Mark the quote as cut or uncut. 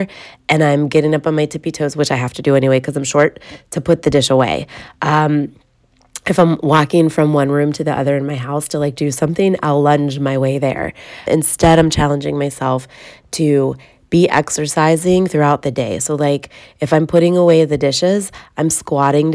cut